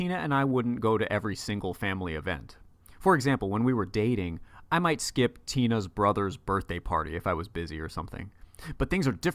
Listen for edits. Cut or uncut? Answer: uncut